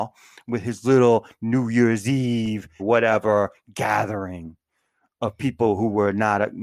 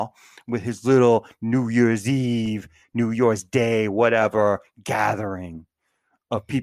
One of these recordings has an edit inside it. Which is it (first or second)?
first